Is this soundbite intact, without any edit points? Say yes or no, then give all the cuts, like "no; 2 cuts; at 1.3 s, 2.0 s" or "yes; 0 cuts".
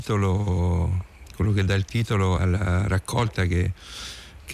no; 1 cut; at 2.4 s